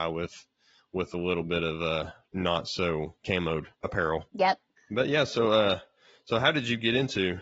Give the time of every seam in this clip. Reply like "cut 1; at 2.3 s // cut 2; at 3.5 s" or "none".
none